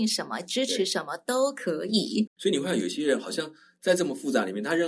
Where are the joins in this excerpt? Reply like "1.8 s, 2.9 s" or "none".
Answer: 2.3 s